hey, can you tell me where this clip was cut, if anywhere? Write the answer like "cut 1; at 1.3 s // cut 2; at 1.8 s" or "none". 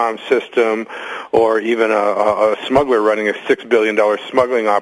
cut 1; at 2.5 s